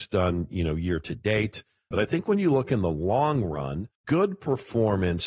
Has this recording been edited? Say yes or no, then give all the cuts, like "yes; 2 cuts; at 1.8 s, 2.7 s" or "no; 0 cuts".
yes; 2 cuts; at 1.9 s, 4.0 s